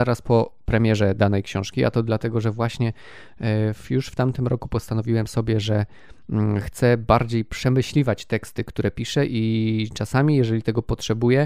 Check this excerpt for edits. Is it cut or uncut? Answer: uncut